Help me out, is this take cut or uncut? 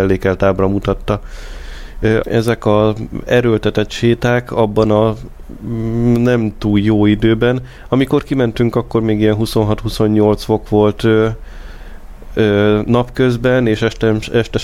cut